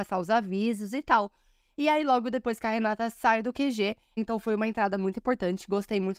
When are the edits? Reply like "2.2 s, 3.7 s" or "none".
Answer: 4.2 s